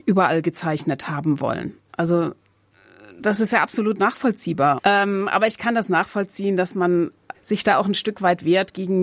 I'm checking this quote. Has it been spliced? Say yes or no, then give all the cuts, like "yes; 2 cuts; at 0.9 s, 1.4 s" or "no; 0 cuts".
yes; 2 cuts; at 4.8 s, 7.3 s